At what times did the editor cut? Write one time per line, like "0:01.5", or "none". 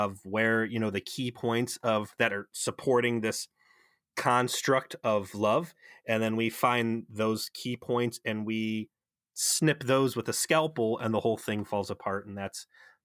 none